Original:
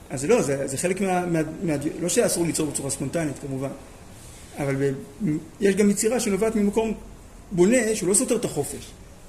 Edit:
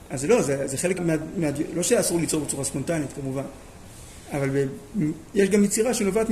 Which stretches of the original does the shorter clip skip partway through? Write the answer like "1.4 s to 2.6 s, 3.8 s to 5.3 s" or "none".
1.0 s to 1.2 s